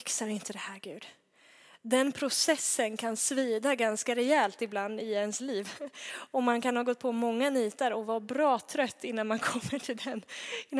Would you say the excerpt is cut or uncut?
uncut